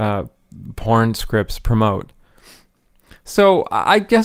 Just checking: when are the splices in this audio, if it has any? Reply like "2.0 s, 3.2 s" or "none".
none